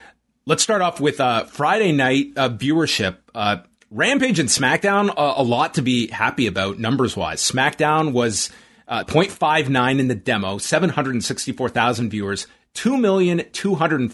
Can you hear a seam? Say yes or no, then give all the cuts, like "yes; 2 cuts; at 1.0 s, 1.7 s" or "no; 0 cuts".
yes; 1 cut; at 9.0 s